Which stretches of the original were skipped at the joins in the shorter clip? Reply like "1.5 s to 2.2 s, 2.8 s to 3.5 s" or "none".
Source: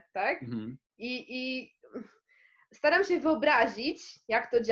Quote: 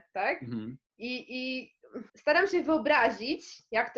2.1 s to 2.7 s